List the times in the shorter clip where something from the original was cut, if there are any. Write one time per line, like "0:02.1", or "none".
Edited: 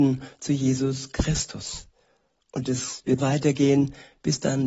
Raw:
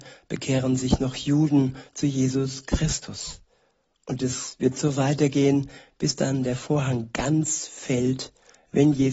0:03.2